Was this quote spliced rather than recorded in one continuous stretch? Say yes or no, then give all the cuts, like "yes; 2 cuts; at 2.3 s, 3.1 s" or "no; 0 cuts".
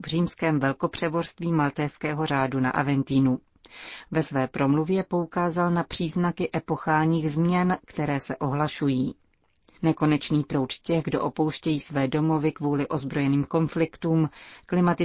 no; 0 cuts